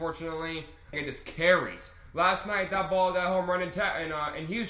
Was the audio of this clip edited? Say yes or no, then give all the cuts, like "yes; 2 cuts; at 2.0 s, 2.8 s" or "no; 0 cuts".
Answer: yes; 1 cut; at 0.9 s